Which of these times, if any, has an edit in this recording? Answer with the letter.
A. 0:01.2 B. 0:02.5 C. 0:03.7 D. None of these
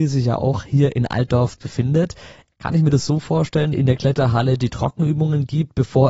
C